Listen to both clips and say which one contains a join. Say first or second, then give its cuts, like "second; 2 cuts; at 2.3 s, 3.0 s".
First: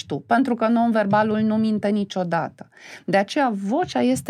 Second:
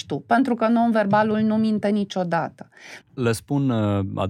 second; 1 cut; at 3.0 s